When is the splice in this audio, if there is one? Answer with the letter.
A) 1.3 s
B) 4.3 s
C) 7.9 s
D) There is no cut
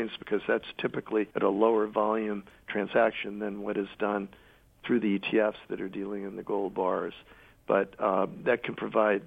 A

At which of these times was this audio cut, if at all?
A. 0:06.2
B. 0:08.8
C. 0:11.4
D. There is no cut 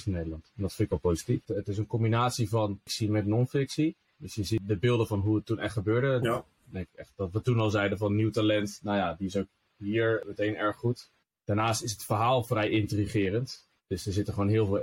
A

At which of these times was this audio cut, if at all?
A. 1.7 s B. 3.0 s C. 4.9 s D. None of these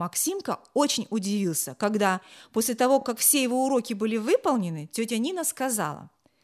D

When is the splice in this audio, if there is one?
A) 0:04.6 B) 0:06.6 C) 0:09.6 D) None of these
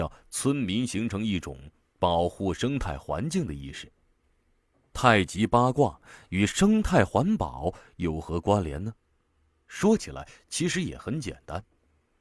D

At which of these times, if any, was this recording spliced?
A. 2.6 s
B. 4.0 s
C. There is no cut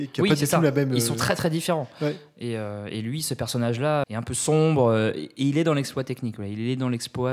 B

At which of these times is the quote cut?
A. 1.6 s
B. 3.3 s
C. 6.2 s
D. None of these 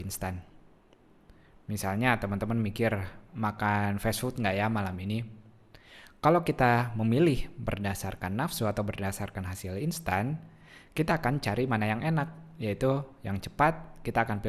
B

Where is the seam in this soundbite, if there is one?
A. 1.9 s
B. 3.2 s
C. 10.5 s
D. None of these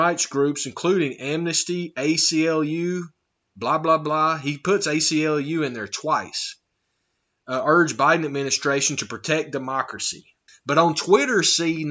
C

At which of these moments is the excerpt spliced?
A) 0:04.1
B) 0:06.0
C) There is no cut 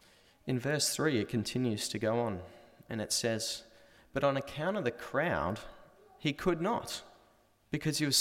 C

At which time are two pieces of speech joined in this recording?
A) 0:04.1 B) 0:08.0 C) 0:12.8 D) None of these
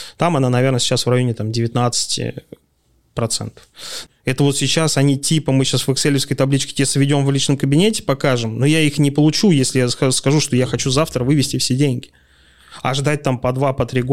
A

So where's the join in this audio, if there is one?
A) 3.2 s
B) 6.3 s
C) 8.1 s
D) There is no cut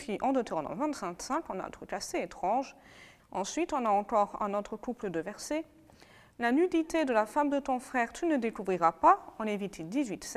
A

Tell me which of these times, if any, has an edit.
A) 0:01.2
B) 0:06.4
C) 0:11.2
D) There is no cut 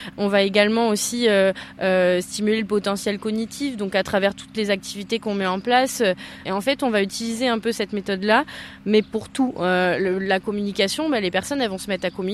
B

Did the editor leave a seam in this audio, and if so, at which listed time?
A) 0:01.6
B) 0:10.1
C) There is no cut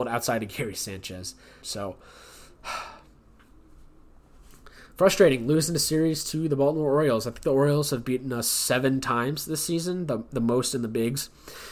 A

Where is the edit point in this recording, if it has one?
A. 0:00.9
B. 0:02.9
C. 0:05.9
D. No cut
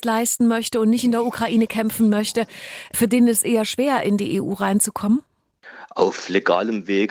D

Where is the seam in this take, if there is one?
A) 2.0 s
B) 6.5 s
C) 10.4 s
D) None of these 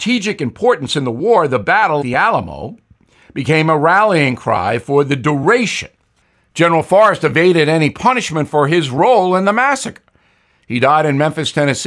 A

